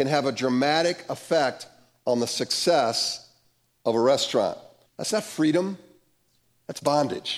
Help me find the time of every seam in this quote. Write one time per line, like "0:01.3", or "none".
0:04.9

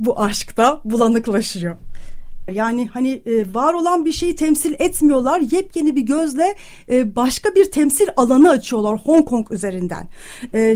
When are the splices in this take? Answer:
0:02.5

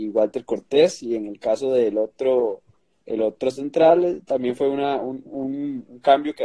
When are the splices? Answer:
none

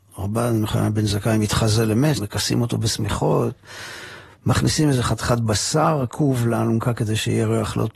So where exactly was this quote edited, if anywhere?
0:02.2

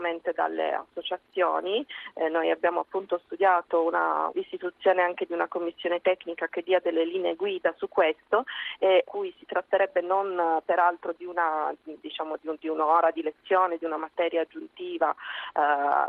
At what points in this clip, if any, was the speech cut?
0:04.3
0:09.0

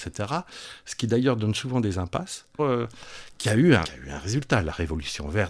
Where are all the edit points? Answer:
0:02.6
0:03.8

